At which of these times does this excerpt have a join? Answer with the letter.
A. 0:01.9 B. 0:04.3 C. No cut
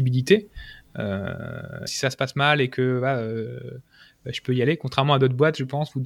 A